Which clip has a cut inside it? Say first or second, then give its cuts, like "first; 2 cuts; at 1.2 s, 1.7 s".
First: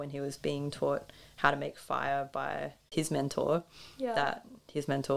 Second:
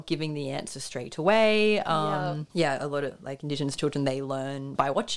first; 1 cut; at 2.9 s